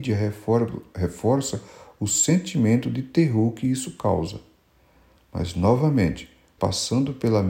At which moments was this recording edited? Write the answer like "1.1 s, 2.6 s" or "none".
6.6 s

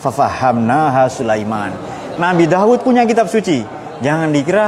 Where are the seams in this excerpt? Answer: 2.2 s

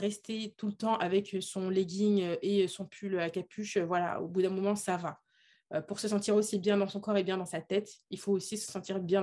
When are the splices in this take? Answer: none

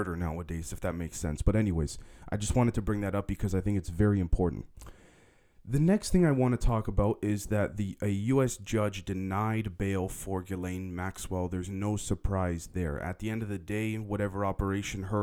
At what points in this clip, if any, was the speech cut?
none

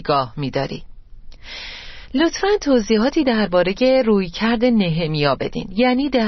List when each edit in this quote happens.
none

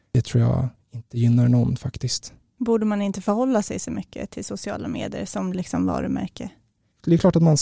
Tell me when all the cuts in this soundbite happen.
none

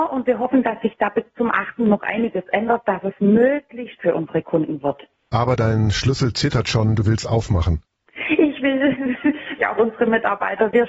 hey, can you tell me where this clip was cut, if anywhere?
4.0 s, 9.6 s

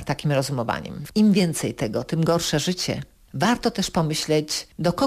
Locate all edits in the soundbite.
1.1 s

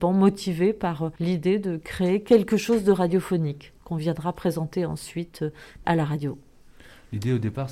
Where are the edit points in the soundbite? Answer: 1.2 s, 5.8 s

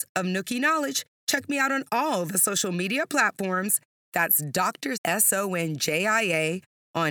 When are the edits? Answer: 4.9 s

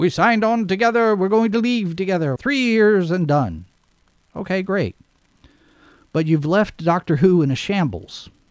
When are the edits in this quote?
2.4 s

